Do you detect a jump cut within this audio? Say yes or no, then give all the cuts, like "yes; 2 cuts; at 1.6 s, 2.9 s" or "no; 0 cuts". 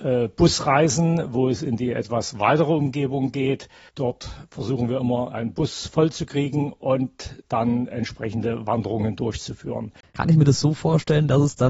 yes; 2 cuts; at 7.9 s, 10.1 s